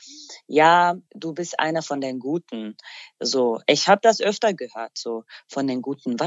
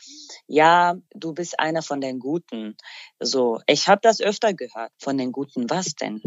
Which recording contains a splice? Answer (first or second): second